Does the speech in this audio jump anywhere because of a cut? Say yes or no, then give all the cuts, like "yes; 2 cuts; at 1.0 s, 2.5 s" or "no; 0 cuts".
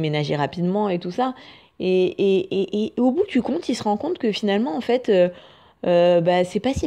no; 0 cuts